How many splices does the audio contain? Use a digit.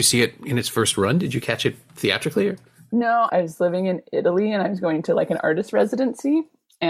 1